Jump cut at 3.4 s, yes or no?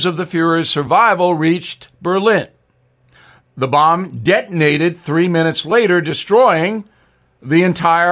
yes